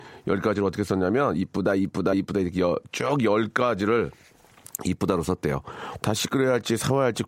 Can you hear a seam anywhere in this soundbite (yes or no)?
yes